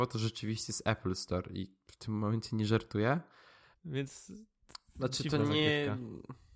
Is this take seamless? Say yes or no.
no